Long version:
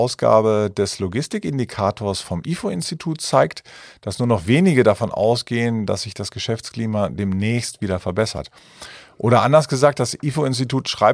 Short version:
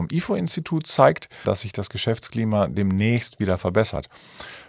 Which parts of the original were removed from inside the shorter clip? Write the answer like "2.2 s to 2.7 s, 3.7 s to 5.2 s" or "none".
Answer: 3.8 s to 5.9 s